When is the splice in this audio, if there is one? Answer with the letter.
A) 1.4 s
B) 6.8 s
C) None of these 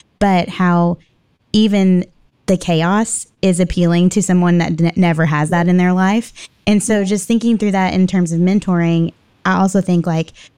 C